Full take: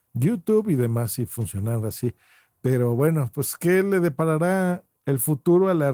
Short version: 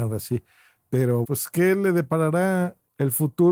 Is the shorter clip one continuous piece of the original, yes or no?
no